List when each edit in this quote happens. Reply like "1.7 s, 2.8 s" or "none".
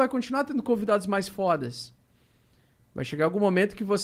none